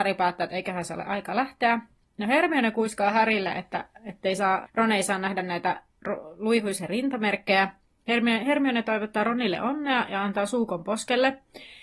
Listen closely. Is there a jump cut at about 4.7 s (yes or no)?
yes